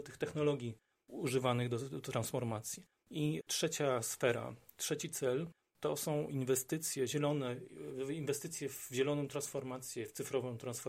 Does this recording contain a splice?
no; 0 cuts

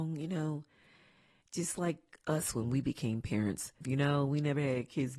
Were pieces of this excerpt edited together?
yes; 1 cut; at 3.8 s

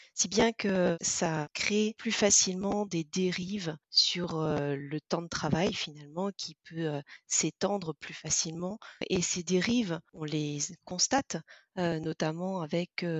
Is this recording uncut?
yes; 0 cuts

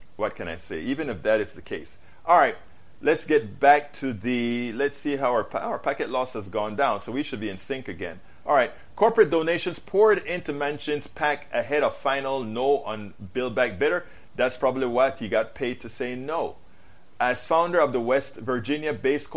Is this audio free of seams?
yes; 0 cuts

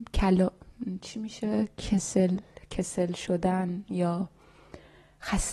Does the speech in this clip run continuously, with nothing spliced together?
yes; 0 cuts

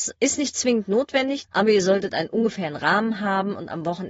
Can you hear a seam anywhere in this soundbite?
yes; 1 cut; at 1.4 s

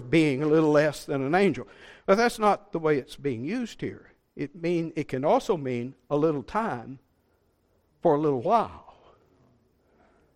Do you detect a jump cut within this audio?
no; 0 cuts

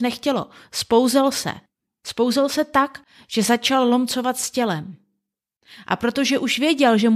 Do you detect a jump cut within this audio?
no; 0 cuts

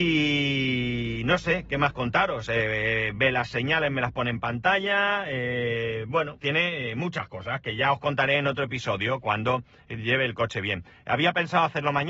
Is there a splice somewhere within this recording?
yes; 1 cut; at 6.4 s

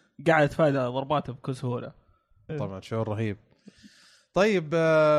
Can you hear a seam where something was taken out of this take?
yes; 1 cut; at 2.5 s

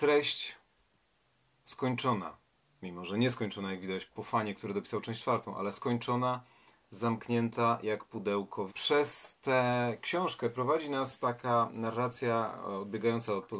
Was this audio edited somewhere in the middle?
yes; 2 cuts; at 4.1 s, 8.7 s

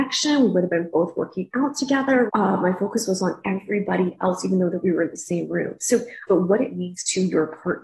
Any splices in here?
yes; 2 cuts; at 2.3 s, 6.3 s

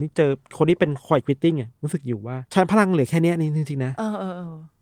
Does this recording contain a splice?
yes; 1 cut; at 2.5 s

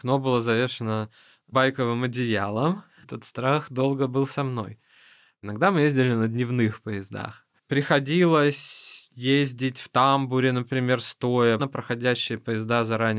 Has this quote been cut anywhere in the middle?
yes; 3 cuts; at 3.0 s, 7.6 s, 11.6 s

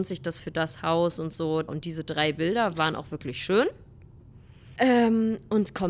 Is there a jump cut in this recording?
yes; 2 cuts; at 1.7 s, 4.8 s

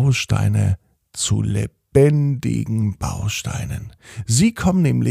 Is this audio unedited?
yes; 0 cuts

